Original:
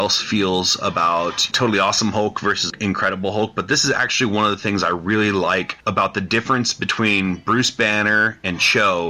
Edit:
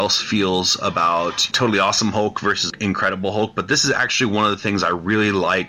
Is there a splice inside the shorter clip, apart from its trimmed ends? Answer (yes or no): no